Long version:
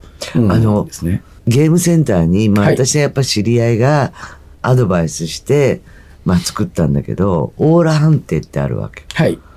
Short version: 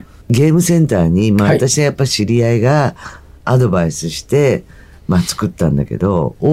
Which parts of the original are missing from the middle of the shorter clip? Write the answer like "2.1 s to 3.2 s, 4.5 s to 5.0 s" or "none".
none